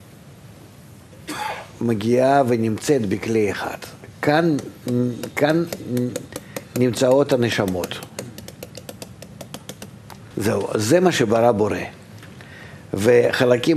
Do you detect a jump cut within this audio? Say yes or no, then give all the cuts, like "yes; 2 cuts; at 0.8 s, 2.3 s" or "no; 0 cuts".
yes; 1 cut; at 10.3 s